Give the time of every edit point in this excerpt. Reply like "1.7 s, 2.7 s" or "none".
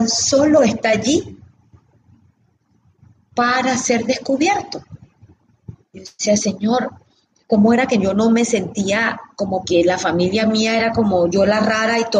5.8 s, 9.6 s